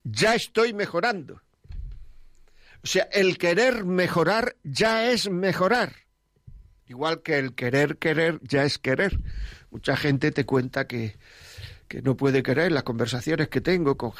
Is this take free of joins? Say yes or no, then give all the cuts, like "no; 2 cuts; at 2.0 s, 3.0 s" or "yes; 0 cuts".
yes; 0 cuts